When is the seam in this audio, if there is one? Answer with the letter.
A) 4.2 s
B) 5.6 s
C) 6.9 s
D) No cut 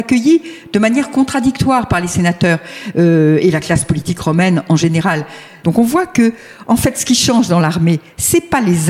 B